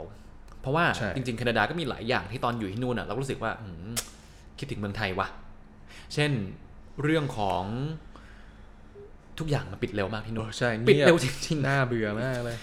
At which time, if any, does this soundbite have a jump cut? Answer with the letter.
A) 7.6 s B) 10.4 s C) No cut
B